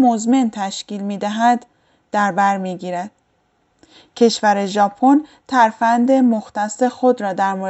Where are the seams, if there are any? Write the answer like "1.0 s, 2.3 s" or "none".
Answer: none